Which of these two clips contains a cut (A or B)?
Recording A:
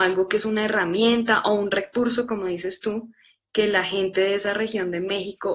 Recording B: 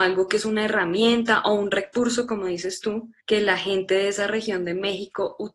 B